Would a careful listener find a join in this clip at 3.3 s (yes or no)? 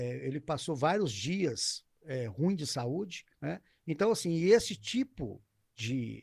yes